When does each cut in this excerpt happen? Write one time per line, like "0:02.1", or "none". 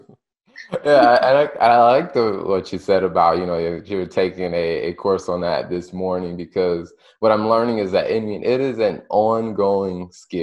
none